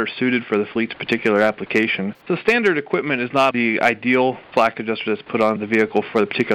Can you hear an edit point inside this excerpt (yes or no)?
yes